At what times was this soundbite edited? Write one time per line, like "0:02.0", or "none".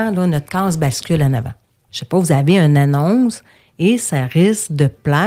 0:01.9